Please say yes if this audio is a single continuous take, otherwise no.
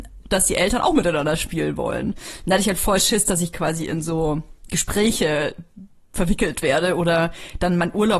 yes